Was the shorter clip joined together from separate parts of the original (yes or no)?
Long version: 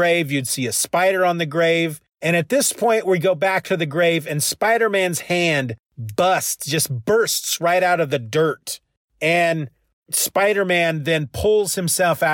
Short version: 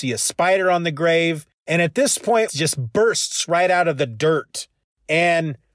yes